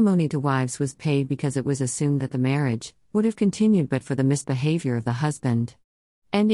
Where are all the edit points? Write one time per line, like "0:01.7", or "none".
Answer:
0:03.0

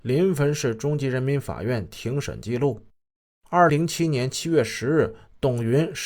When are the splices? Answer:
0:03.7

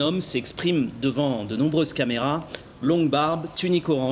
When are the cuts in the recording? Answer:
none

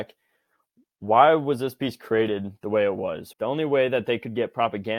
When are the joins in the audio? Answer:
0:03.3

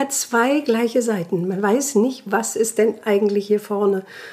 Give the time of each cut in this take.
none

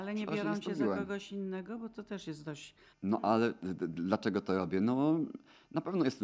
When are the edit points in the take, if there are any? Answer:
0:02.9

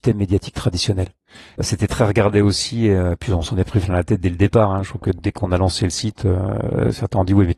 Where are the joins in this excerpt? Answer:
0:01.6

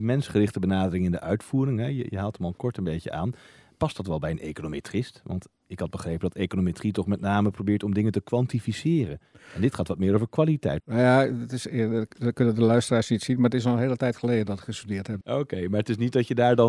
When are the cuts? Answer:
0:10.8
0:15.2

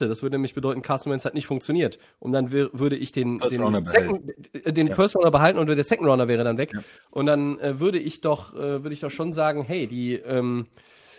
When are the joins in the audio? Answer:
none

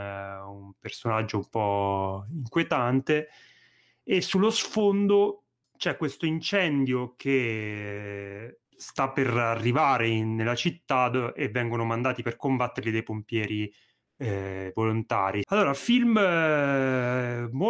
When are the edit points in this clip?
0:15.4

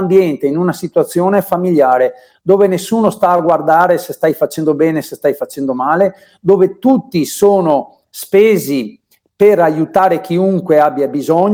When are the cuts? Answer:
none

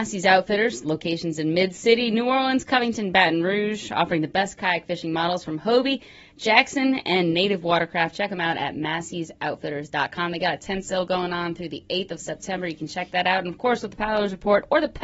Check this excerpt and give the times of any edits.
none

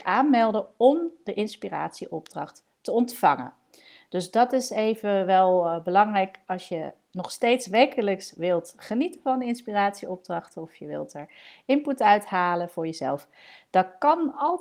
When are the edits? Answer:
none

